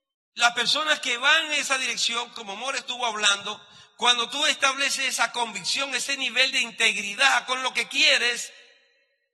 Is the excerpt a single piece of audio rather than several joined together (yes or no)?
yes